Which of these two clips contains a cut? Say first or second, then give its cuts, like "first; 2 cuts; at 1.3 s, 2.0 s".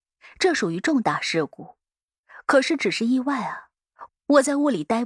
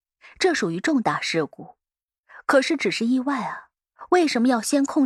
first; 1 cut; at 4.1 s